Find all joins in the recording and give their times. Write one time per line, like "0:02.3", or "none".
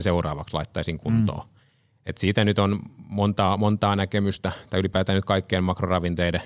none